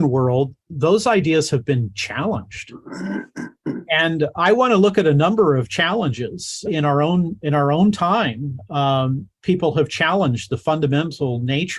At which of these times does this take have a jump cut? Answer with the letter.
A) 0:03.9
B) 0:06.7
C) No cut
B